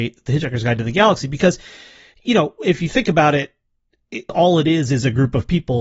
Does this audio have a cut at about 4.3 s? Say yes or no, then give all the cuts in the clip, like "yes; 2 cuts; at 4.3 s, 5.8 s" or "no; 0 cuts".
yes; 1 cut; at 4.3 s